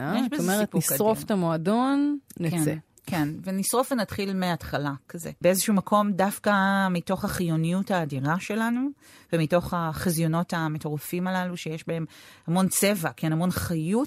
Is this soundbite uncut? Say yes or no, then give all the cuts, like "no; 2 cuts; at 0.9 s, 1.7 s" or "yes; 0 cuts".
no; 1 cut; at 5.4 s